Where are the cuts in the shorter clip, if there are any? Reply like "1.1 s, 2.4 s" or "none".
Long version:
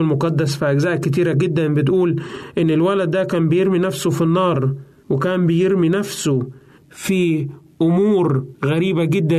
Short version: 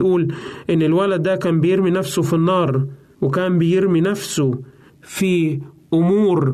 none